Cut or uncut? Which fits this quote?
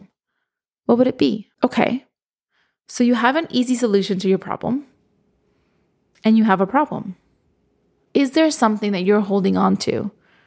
cut